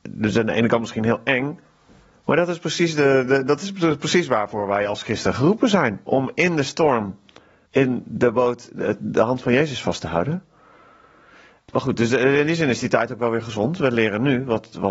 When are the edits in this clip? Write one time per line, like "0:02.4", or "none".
none